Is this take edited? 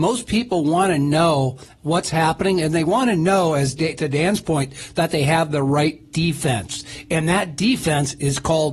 no; 0 cuts

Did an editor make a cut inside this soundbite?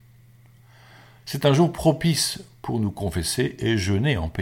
no; 0 cuts

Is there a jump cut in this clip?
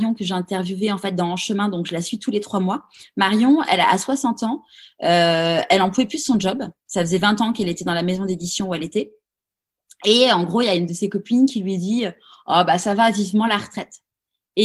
no; 0 cuts

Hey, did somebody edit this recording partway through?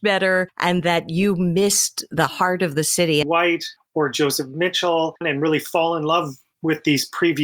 yes; 2 cuts; at 3.2 s, 5.2 s

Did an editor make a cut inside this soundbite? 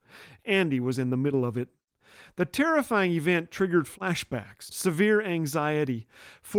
yes; 1 cut; at 4.7 s

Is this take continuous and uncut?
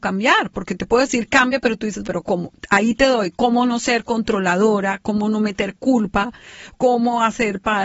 no; 1 cut; at 2.0 s

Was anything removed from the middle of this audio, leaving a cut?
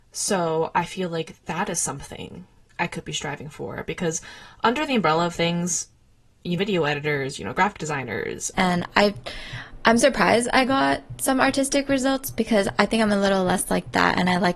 yes; 2 cuts; at 6.6 s, 8.5 s

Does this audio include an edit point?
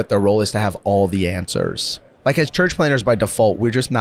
yes; 1 cut; at 2.2 s

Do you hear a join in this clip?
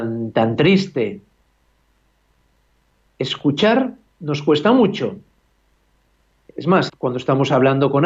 yes; 1 cut; at 6.9 s

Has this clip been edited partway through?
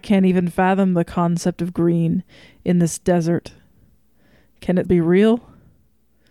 yes; 1 cut; at 4.8 s

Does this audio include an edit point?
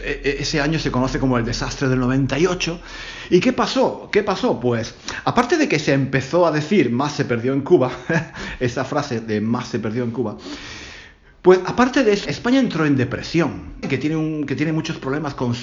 yes; 2 cuts; at 12.2 s, 13.8 s

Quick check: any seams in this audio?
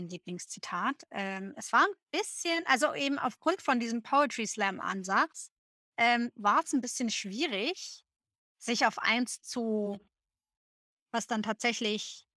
yes; 1 cut; at 10.9 s

